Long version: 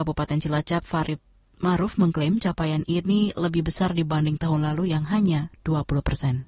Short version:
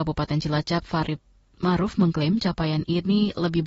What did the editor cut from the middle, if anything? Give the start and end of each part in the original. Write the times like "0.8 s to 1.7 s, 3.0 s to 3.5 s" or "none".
none